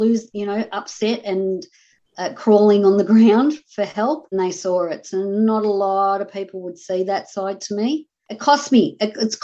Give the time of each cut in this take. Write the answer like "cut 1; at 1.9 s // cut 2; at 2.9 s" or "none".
cut 1; at 4.3 s // cut 2; at 8.2 s